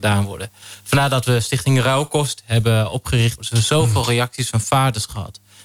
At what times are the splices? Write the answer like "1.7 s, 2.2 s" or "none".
3.4 s